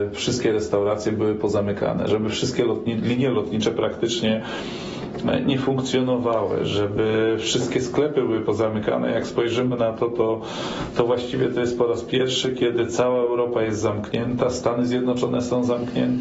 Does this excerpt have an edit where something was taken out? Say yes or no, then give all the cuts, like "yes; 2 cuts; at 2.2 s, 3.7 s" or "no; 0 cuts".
no; 0 cuts